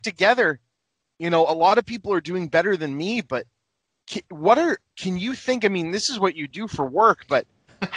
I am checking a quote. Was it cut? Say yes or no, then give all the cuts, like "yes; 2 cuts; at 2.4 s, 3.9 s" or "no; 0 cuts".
no; 0 cuts